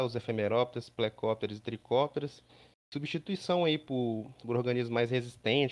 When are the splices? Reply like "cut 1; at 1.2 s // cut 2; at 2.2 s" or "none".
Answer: none